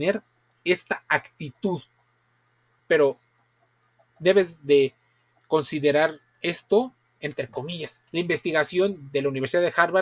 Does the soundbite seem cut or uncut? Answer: cut